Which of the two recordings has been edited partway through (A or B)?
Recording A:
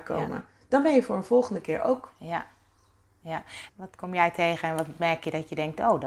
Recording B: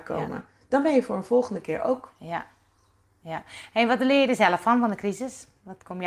A